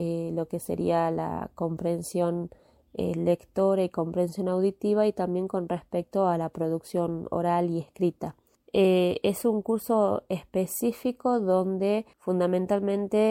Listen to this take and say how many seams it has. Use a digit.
1